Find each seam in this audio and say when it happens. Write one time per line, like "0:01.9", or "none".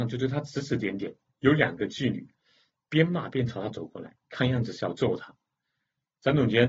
none